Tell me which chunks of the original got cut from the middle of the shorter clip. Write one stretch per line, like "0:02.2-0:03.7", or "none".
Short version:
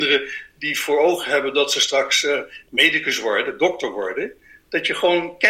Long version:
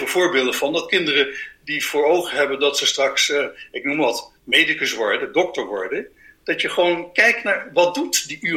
0:03.7-0:04.4